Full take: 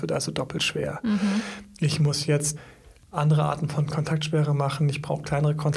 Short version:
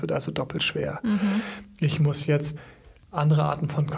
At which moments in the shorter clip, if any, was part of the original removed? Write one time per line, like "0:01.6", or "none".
none